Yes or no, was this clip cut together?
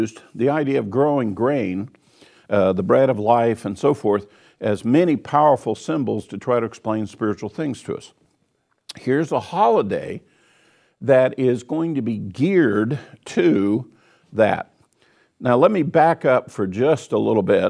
no